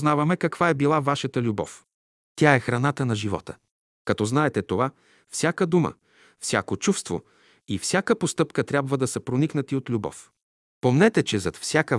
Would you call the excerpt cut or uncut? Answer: cut